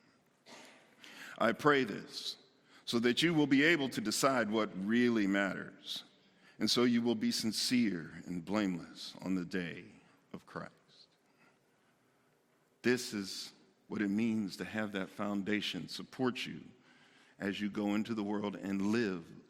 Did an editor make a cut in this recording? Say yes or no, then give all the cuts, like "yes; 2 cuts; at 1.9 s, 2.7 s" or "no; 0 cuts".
no; 0 cuts